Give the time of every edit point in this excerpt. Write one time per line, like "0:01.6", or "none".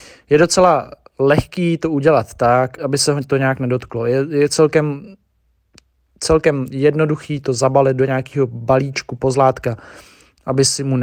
0:02.8